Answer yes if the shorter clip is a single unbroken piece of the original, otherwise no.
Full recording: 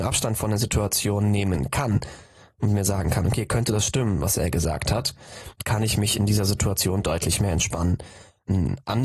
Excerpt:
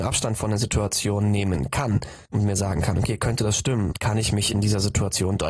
no